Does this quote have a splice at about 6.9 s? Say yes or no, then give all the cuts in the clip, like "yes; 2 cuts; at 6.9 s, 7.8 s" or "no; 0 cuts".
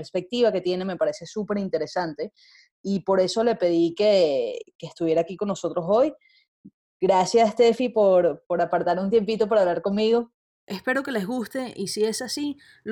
no; 1 cut; at 10.6 s